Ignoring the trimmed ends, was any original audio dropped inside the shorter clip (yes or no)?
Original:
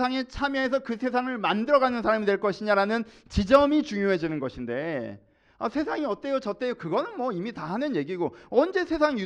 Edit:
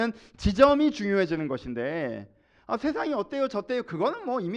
no